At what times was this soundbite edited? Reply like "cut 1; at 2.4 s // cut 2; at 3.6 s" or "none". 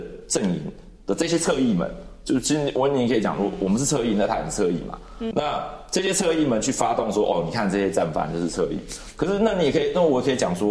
cut 1; at 5.3 s